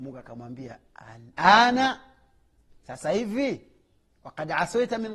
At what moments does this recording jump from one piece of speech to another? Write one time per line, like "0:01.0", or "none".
0:01.3